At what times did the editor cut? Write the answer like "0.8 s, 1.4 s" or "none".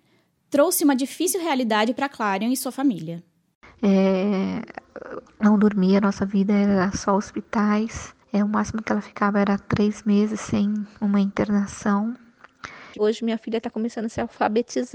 5.3 s, 8.2 s, 12.9 s